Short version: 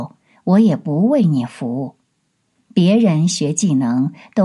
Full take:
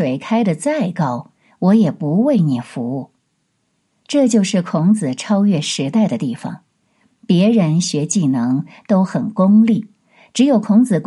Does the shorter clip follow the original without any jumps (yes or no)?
no